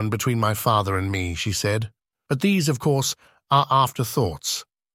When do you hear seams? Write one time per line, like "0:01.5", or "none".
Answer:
0:02.3